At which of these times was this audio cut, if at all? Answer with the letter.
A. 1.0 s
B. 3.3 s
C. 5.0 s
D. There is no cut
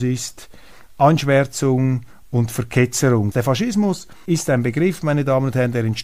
B